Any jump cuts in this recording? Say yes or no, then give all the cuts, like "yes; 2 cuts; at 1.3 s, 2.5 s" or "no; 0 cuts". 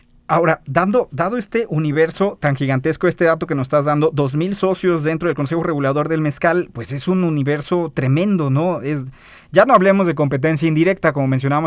no; 0 cuts